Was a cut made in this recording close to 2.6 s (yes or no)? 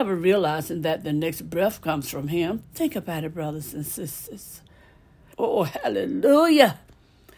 yes